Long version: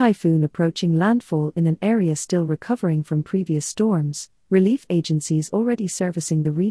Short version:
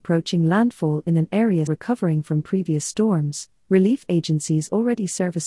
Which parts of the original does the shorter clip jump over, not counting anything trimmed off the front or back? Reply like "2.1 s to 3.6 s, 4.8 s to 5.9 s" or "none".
2.2 s to 2.5 s